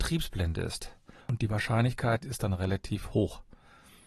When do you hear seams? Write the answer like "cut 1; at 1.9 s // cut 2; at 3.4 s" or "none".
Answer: cut 1; at 1.2 s // cut 2; at 2.2 s

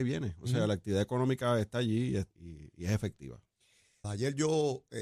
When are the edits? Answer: cut 1; at 2.3 s // cut 2; at 4.0 s

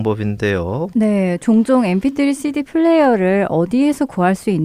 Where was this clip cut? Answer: cut 1; at 0.9 s

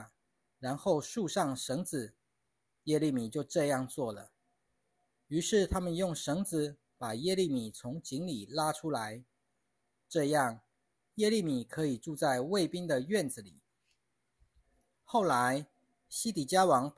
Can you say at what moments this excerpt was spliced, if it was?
none

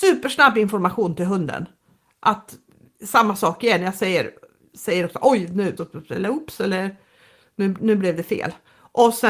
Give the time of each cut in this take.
cut 1; at 5.8 s

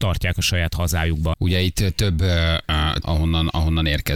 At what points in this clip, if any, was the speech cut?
cut 1; at 1.3 s // cut 2; at 3.0 s

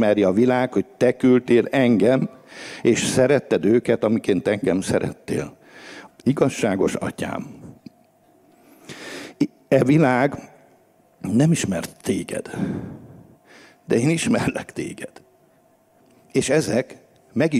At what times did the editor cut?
cut 1; at 6.1 s

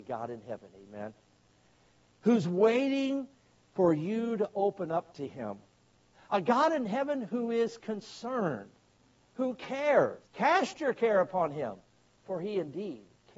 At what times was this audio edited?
cut 1; at 10.3 s

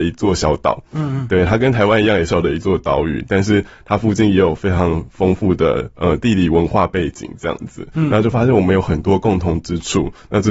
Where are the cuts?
cut 1; at 2.3 s

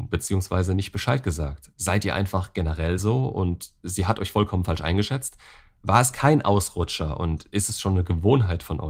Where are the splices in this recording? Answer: none

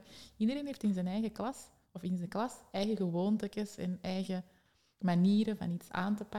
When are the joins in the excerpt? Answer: none

